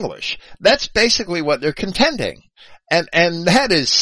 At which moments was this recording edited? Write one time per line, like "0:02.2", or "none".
none